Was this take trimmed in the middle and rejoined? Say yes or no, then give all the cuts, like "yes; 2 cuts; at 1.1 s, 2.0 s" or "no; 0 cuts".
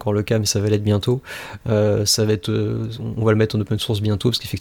yes; 1 cut; at 1.6 s